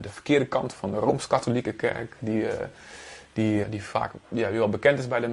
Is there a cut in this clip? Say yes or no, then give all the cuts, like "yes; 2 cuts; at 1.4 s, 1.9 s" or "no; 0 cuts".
yes; 1 cut; at 3.6 s